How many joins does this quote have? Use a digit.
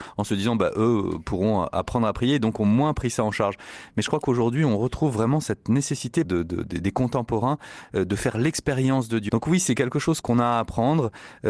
2